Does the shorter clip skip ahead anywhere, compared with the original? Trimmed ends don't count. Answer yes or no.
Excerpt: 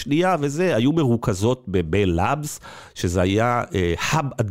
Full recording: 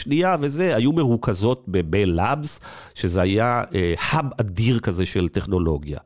no